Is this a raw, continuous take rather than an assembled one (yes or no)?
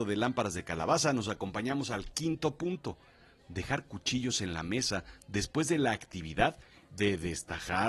yes